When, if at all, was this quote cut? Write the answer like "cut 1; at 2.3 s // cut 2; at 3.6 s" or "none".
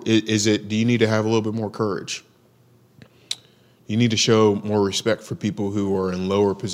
none

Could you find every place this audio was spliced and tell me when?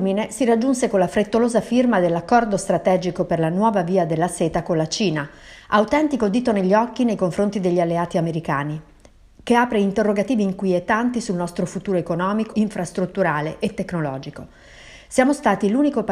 cut 1; at 12.5 s

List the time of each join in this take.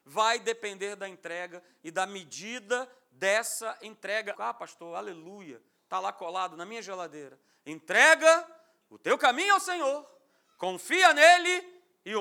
cut 1; at 4.3 s

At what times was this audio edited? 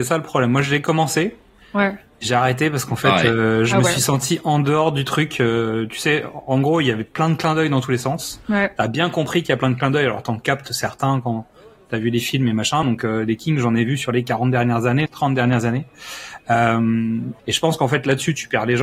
cut 1; at 12.8 s // cut 2; at 15.1 s // cut 3; at 17.4 s

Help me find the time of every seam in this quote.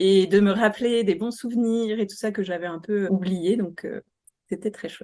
cut 1; at 3.1 s

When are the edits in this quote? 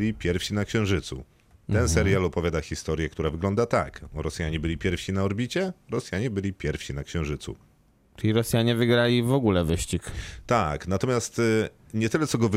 none

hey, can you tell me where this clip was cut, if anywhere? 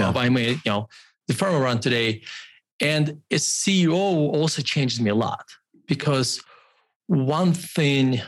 none

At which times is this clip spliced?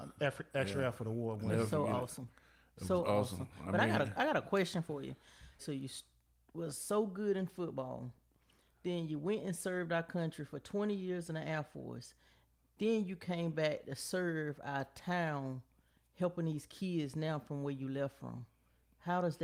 cut 1; at 5.6 s

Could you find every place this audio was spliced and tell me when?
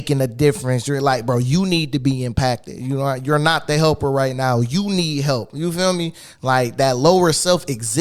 none

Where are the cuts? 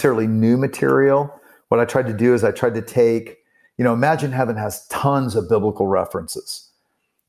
none

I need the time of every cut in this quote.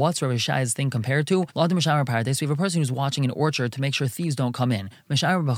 none

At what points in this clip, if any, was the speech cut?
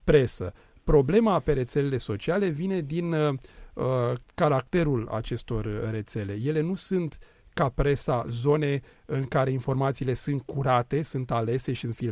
cut 1; at 4.2 s

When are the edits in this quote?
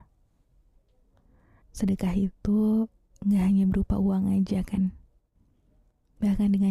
cut 1; at 1.6 s

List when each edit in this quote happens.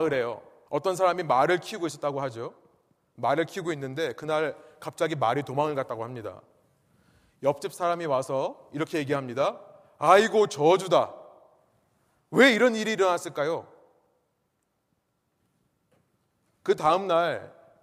none

